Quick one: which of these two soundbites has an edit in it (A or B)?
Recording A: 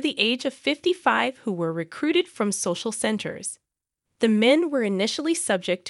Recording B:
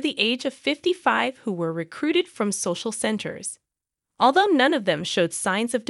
A